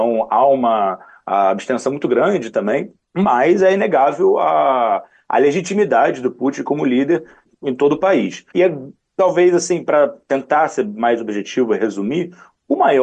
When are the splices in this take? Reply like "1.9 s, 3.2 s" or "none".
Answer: 8.5 s